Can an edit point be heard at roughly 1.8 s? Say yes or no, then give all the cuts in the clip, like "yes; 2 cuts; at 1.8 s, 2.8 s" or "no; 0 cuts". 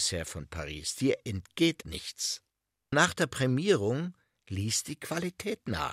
yes; 1 cut; at 1.8 s